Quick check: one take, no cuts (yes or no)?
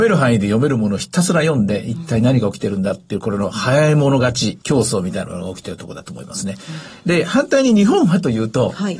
no